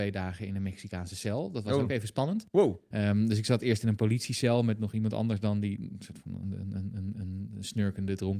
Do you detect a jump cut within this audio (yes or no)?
no